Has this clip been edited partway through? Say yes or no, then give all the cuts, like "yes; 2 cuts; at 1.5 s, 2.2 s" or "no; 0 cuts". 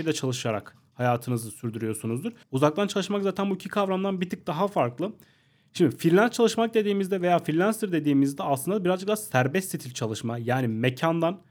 yes; 1 cut; at 2.4 s